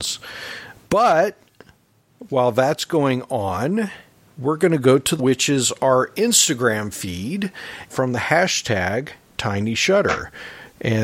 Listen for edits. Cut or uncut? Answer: cut